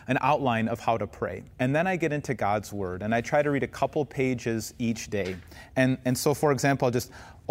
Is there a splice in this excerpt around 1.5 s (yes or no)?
yes